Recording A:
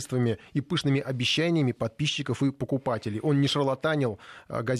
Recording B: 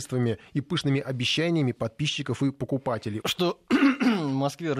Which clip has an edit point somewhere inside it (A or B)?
B